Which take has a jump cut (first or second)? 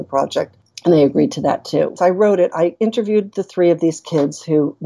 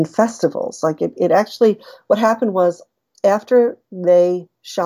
first